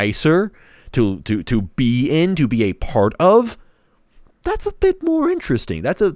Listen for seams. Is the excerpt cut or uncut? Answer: uncut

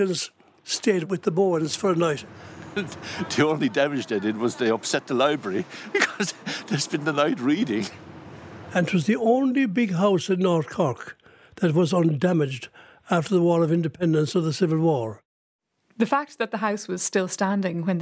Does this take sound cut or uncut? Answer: uncut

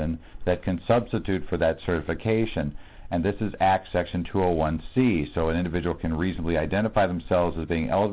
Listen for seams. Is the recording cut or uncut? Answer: uncut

